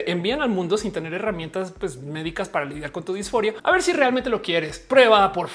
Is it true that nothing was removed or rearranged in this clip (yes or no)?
yes